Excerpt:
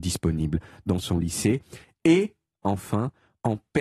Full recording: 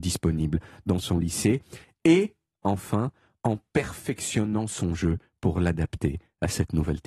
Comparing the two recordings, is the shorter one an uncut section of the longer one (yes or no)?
yes